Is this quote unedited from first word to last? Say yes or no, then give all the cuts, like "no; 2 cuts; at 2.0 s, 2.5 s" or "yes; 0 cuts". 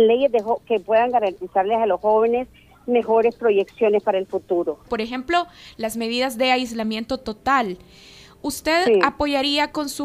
no; 1 cut; at 4.9 s